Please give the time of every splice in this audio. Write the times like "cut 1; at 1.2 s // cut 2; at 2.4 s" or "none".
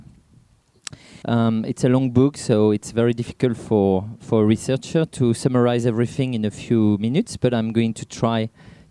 cut 1; at 1.2 s